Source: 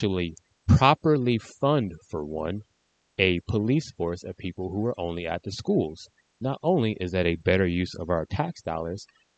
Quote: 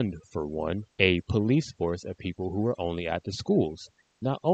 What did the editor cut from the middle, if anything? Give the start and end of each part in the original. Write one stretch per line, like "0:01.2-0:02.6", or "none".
0:02.7-0:03.1